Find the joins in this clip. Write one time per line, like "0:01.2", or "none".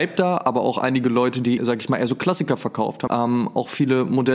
0:01.6
0:03.1